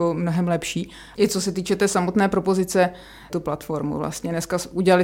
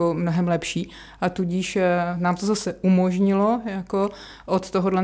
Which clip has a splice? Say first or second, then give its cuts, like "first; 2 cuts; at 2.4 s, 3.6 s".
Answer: first; 2 cuts; at 1.1 s, 3.3 s